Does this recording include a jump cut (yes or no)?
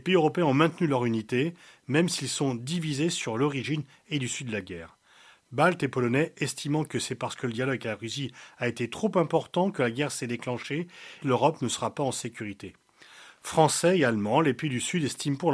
yes